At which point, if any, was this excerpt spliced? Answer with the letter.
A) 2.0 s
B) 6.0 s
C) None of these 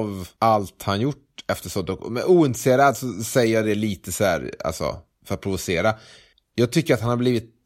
C